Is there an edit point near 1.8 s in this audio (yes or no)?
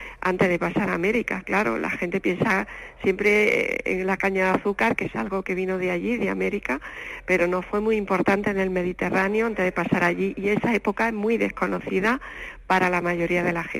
no